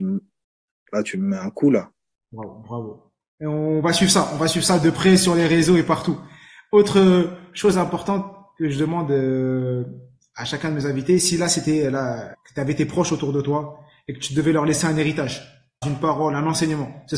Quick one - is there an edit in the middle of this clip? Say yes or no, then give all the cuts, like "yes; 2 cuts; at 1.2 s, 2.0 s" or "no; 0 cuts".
yes; 3 cuts; at 2.2 s, 12.3 s, 15.8 s